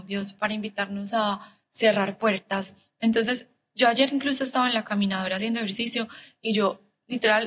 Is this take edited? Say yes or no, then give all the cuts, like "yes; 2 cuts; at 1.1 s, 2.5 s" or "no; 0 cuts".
no; 0 cuts